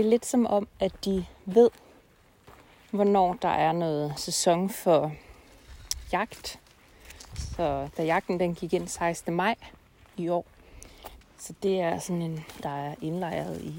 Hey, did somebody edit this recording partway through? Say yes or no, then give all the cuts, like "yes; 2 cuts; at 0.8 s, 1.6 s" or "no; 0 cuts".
yes; 2 cuts; at 11.2 s, 12.6 s